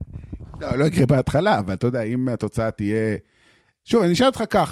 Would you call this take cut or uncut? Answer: uncut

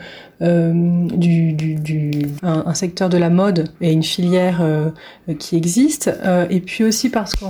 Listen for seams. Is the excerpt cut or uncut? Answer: cut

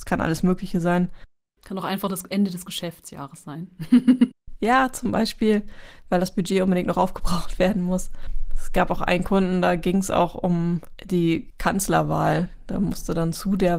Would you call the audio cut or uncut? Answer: uncut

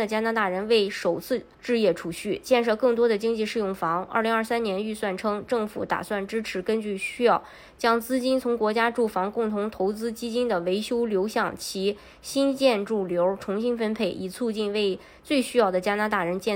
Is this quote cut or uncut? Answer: cut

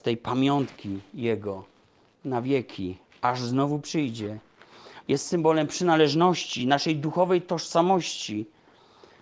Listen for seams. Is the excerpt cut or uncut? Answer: cut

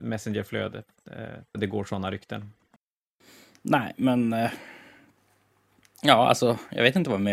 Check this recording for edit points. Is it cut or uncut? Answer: cut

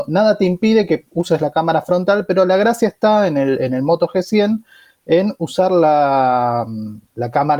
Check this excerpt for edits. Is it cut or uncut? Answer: uncut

